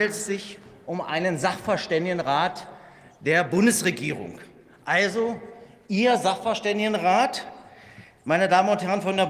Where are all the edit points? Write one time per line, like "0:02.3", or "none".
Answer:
none